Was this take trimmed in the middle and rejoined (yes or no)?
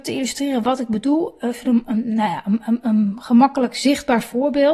no